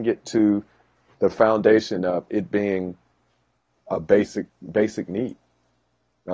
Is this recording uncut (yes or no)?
yes